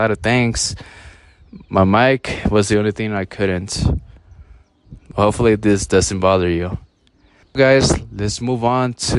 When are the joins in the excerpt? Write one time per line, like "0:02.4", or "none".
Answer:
0:07.6